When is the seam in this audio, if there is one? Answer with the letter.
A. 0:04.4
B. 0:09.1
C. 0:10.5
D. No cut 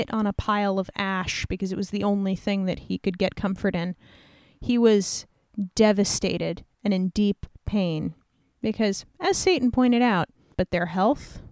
C